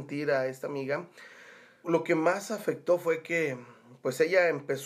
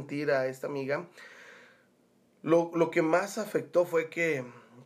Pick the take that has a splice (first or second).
first